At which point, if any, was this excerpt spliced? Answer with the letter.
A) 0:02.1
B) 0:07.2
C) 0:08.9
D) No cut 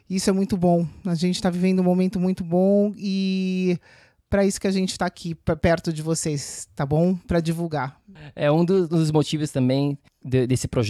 D